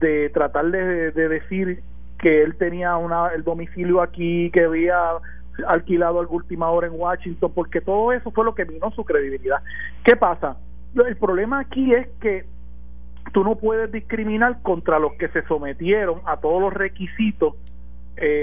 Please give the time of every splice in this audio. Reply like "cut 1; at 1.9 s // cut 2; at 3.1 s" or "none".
none

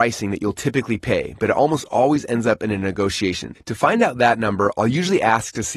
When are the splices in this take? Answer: cut 1; at 3.5 s

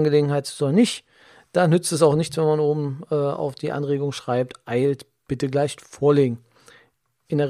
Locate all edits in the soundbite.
none

